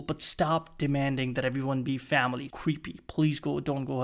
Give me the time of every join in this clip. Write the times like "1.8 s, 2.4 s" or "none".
2.5 s